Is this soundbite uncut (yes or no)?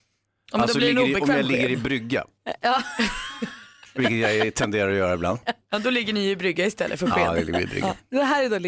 yes